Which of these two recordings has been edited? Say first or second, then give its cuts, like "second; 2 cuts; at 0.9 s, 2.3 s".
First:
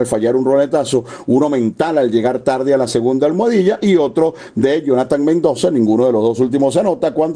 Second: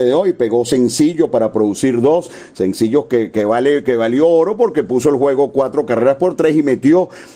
second; 1 cut; at 3.3 s